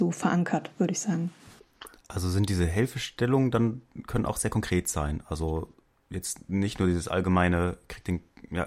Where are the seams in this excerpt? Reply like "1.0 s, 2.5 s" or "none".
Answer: 2.0 s